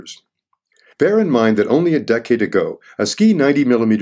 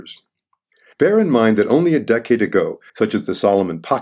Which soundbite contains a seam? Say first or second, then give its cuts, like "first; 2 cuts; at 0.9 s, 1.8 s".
second; 1 cut; at 2.9 s